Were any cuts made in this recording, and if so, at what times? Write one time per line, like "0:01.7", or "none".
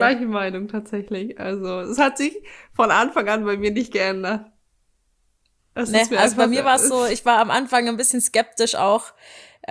none